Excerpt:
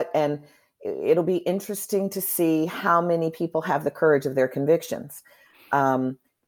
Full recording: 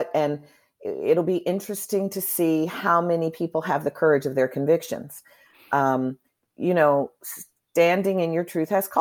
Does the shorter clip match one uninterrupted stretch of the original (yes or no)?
yes